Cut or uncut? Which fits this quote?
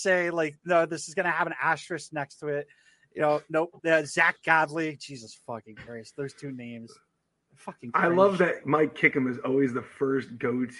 uncut